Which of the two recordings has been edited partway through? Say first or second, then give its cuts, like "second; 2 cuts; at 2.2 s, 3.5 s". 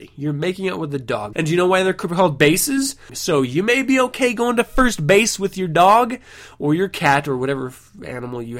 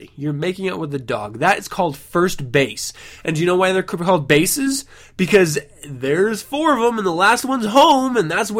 first; 2 cuts; at 1.3 s, 3.1 s